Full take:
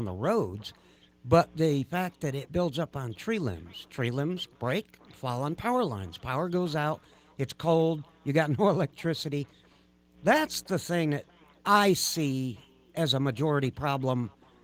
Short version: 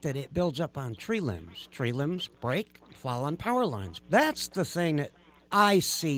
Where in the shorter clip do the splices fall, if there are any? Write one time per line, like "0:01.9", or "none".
0:04.0